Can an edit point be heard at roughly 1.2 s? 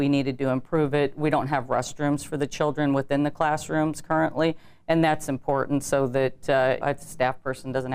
no; 1 cut; at 6.8 s

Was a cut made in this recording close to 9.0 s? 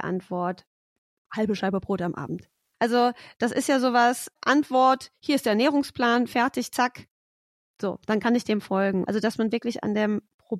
yes; 2 cuts; at 4.4 s, 9.0 s

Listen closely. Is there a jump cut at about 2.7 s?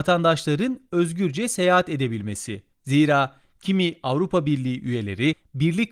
yes; 1 cut; at 2.7 s

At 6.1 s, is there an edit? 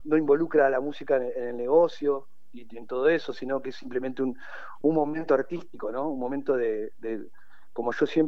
no; 1 cut; at 4.8 s

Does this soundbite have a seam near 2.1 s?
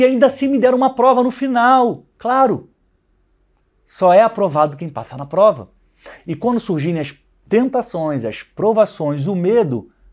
no; 1 cut; at 6.2 s

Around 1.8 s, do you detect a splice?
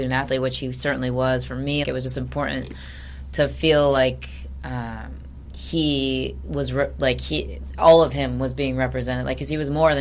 yes; 1 cut; at 1.8 s

